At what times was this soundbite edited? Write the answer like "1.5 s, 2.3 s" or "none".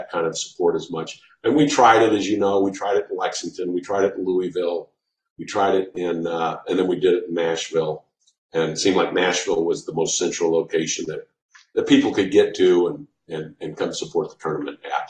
none